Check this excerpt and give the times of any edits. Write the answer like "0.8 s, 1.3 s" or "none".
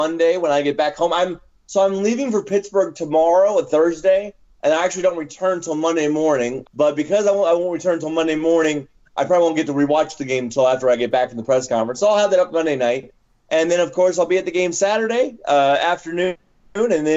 6.6 s